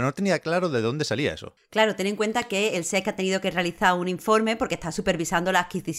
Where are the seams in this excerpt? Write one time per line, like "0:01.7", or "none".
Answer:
0:01.6